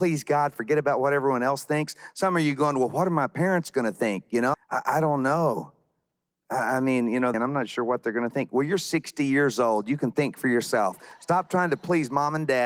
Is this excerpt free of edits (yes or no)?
no